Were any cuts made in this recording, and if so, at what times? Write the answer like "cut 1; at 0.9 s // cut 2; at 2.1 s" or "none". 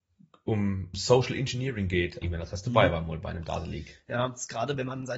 cut 1; at 0.9 s // cut 2; at 2.2 s